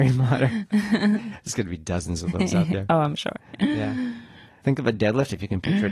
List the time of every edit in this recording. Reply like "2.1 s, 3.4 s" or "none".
4.6 s